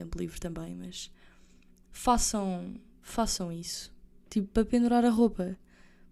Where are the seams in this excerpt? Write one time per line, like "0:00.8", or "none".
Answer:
0:04.2